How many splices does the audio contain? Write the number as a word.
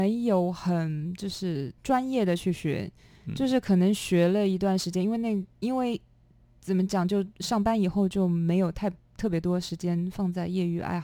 one